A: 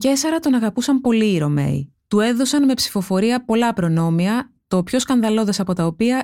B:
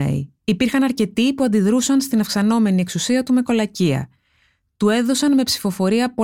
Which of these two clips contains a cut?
A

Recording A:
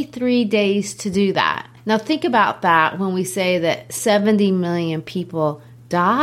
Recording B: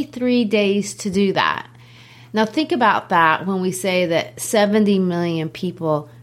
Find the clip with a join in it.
A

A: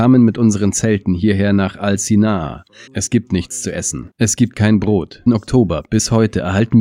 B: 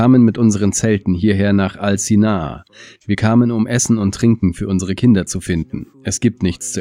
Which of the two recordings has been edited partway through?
A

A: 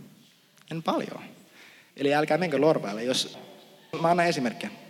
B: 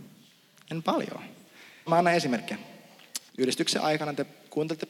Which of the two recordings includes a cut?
B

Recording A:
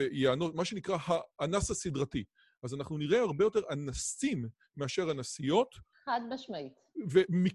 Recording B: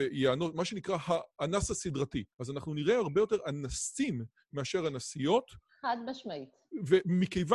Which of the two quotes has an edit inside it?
B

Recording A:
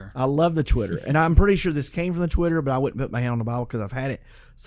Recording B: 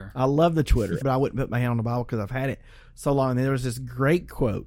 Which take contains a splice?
B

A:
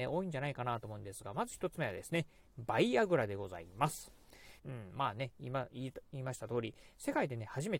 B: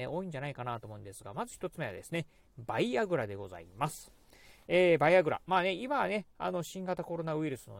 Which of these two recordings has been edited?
A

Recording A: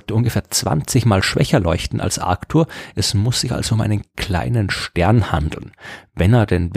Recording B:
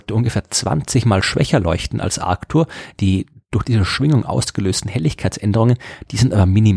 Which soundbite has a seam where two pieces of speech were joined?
B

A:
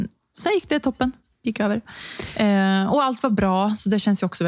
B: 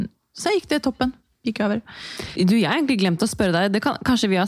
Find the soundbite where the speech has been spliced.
B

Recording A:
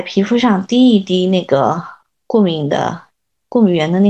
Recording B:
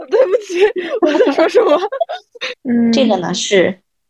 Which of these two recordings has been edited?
B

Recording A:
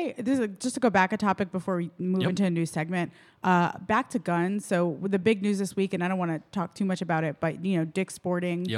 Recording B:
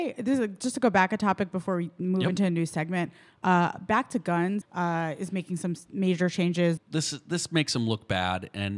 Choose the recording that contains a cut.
B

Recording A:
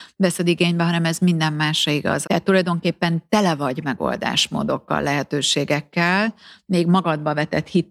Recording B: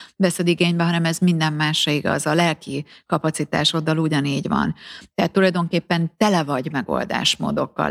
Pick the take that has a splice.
A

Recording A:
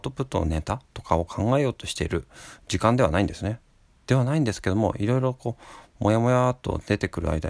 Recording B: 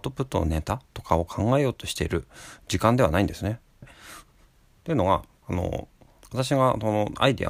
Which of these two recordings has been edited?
B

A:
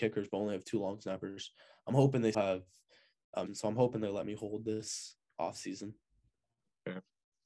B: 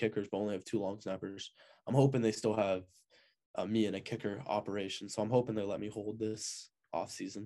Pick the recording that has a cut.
A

